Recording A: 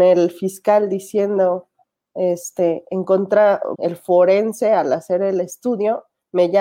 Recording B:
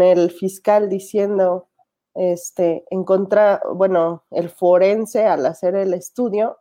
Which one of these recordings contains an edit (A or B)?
A